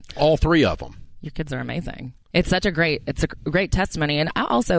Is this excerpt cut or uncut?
cut